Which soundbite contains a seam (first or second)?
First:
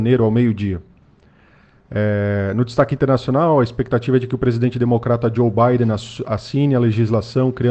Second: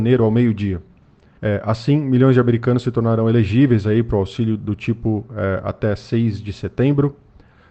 second